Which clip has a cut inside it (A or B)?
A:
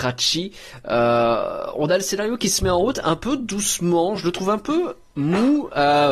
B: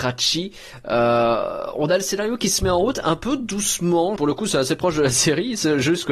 B